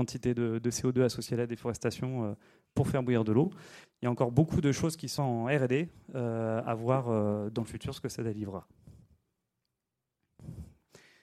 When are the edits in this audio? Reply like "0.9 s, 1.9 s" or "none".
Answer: 3.8 s, 5.2 s